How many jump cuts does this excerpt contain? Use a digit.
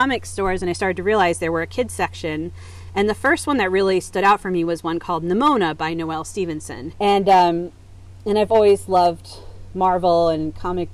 1